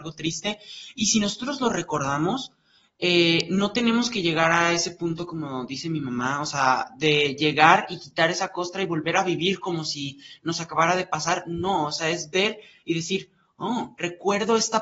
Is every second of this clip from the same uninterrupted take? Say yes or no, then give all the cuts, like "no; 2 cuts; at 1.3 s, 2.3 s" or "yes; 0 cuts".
yes; 0 cuts